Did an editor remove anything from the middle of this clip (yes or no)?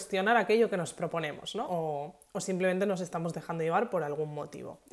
yes